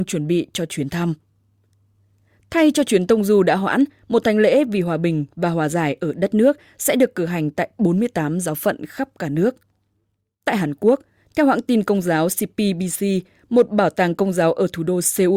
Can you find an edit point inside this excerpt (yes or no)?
no